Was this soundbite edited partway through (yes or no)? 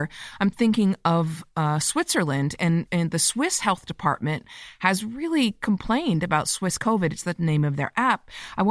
yes